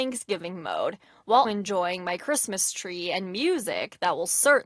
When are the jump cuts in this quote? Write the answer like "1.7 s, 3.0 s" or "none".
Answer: 1.4 s